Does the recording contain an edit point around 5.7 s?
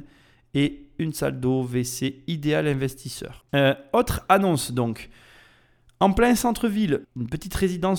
no; 2 cuts; at 3.4 s, 7.0 s

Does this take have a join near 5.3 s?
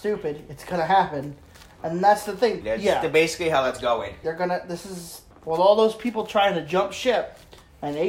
yes; 3 cuts; at 2.6 s, 4.2 s, 5.3 s

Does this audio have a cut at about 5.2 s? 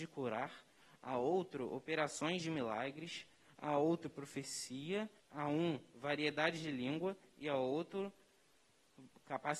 yes; 1 cut; at 5.2 s

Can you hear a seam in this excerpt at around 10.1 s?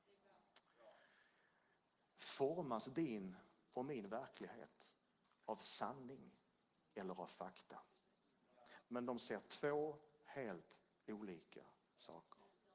no; 2 cuts; at 2.1 s, 8.8 s

